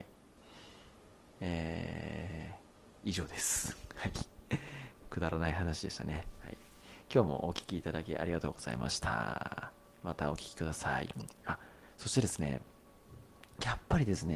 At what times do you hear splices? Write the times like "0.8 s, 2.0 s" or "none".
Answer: none